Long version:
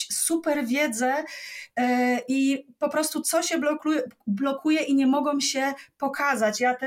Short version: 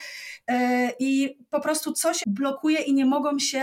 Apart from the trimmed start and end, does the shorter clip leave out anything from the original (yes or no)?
yes